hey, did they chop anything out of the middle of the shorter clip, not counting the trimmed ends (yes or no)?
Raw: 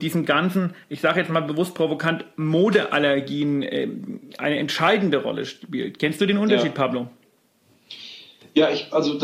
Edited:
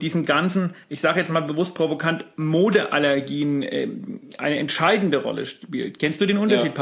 no